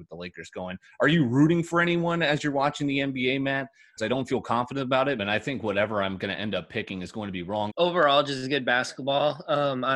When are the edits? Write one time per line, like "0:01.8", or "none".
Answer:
0:04.0
0:05.2
0:07.7